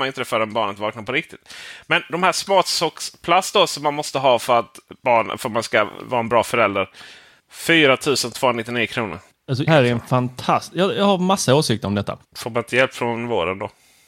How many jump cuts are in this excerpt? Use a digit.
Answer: 2